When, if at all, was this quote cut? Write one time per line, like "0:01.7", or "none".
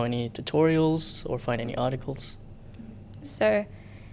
0:03.2